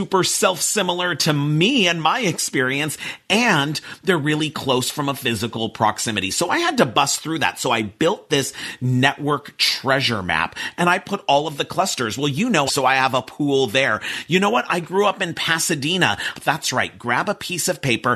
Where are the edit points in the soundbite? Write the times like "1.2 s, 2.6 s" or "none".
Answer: 12.7 s, 16.3 s